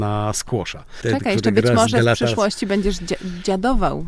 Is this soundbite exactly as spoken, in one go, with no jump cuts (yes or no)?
no